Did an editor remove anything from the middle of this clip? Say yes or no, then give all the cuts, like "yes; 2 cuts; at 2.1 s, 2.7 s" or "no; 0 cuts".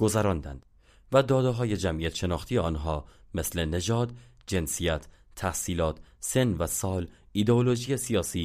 no; 0 cuts